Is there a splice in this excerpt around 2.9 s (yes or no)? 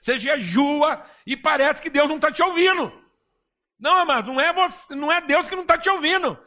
no